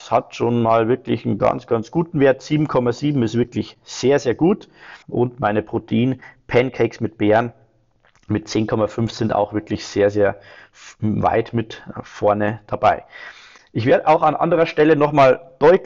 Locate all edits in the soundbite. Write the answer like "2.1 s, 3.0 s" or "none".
5.0 s

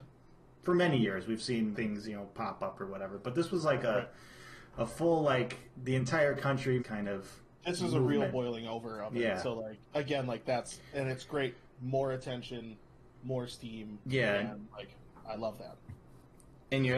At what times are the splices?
1.7 s, 6.8 s

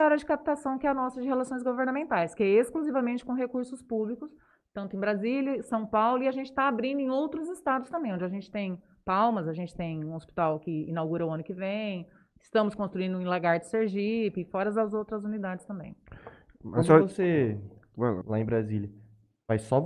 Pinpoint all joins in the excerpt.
18.2 s

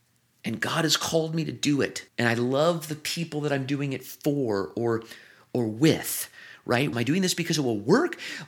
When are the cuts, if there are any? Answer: 2.1 s, 6.9 s

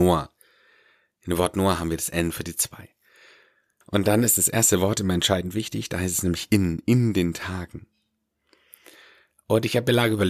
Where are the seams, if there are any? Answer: 3.8 s

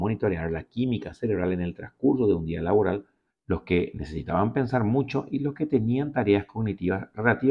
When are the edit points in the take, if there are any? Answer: 3.3 s

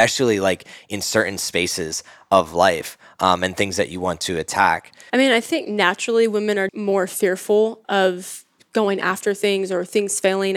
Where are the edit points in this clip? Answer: 5.1 s, 6.7 s, 7.8 s

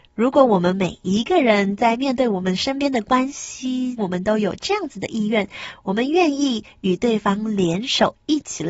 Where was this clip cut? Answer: 4.0 s

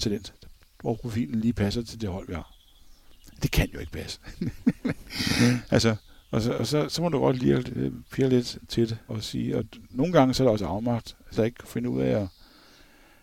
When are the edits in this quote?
9.1 s, 11.3 s

